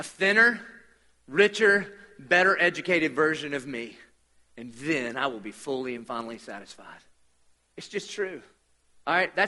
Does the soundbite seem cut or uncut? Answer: uncut